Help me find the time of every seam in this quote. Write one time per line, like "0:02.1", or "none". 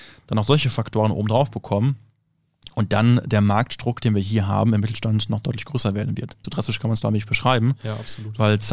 0:06.4